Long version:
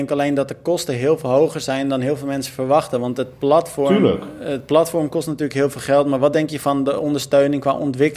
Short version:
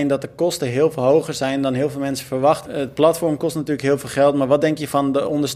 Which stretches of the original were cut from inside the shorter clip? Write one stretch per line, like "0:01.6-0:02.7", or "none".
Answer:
0:02.9-0:04.4